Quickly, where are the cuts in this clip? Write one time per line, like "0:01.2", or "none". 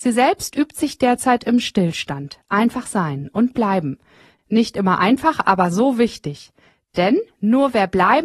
none